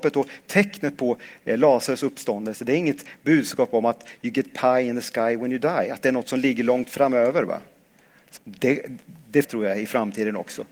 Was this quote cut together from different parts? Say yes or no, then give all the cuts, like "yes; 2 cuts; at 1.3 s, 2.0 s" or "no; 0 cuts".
yes; 2 cuts; at 8.4 s, 9.4 s